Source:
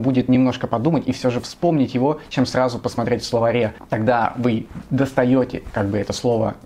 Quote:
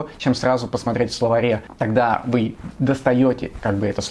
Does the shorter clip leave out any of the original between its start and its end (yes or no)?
no